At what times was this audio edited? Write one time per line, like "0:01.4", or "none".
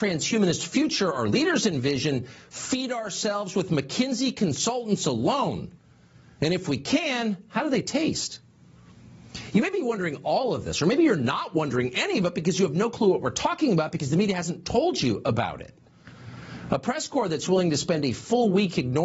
none